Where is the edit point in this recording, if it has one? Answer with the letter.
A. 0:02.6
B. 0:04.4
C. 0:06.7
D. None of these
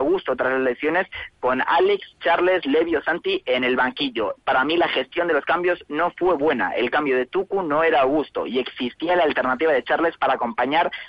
B